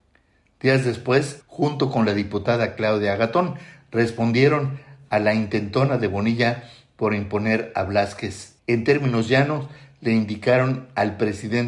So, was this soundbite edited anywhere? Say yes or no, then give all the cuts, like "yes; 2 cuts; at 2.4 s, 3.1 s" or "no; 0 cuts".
yes; 2 cuts; at 1.4 s, 8.6 s